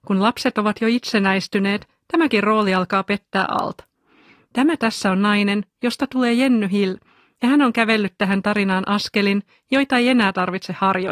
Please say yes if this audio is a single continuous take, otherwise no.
no